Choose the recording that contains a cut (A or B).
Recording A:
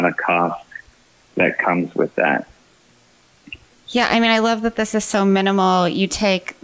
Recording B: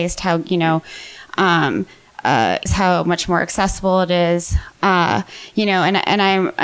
B